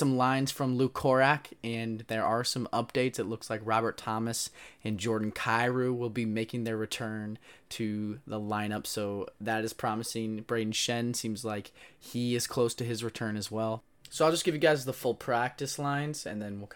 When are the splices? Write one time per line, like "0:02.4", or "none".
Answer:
none